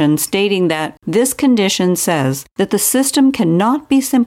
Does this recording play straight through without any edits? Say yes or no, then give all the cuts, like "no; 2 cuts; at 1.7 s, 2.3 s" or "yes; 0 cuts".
no; 1 cut; at 1.0 s